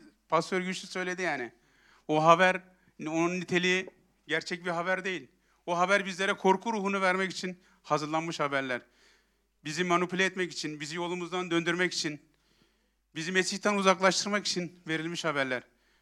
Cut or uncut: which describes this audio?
uncut